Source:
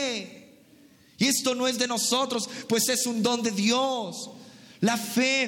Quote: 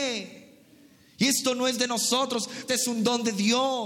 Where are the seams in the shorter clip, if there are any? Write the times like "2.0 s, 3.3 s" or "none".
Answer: 2.7 s